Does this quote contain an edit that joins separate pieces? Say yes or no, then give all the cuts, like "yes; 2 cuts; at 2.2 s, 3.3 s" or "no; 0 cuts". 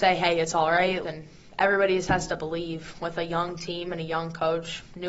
yes; 1 cut; at 1.0 s